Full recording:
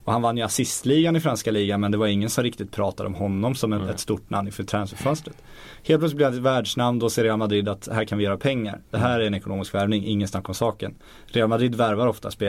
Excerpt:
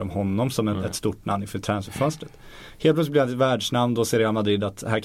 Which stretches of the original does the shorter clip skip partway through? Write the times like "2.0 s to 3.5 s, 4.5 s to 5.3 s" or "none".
none